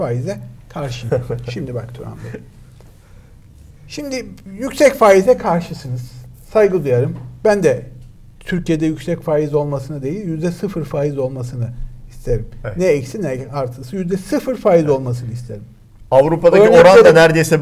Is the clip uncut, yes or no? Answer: yes